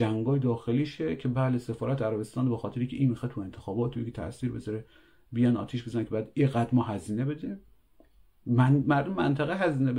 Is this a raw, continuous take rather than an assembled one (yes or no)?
yes